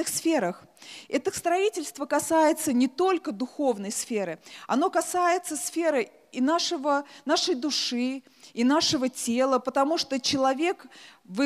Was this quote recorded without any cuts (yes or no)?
yes